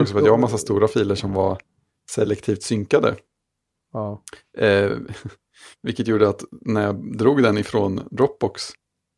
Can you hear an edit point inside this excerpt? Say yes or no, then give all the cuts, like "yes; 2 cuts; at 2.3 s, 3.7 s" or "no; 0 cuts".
no; 0 cuts